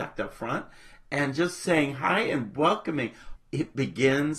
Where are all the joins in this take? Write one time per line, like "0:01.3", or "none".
0:03.3